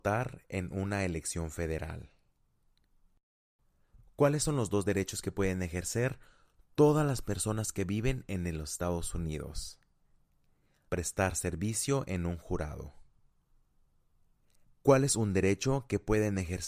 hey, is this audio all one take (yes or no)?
no